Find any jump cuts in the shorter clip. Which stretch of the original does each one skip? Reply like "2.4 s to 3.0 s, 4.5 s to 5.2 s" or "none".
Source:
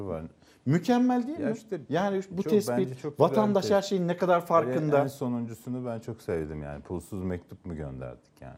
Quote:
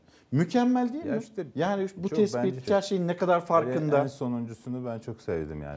3.0 s to 3.7 s